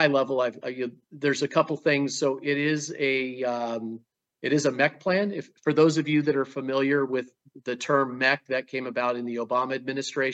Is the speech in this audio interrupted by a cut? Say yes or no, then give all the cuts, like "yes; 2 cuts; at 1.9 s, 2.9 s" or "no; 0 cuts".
no; 0 cuts